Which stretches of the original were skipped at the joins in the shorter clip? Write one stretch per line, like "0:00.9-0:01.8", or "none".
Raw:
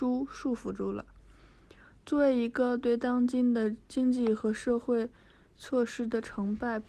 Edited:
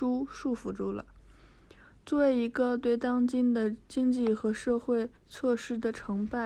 0:05.2-0:05.5